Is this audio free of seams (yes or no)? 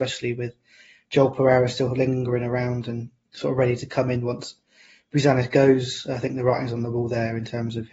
yes